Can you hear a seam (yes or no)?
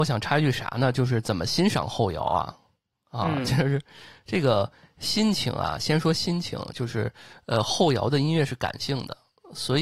no